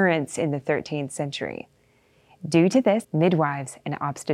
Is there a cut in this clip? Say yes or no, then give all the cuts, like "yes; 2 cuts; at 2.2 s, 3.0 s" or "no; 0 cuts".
yes; 1 cut; at 3.0 s